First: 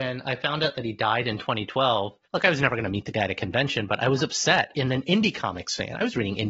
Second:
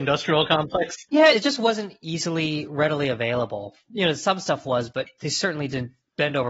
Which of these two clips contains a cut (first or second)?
first